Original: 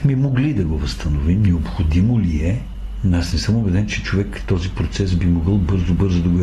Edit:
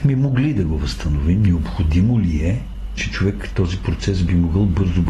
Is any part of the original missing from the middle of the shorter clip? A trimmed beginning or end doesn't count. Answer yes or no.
yes